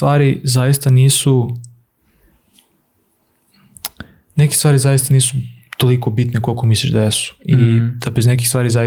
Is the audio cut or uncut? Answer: uncut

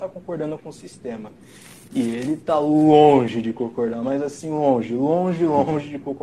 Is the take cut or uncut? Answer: uncut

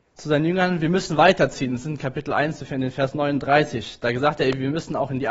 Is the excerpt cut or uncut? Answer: uncut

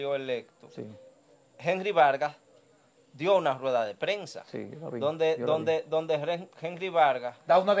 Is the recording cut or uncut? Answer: uncut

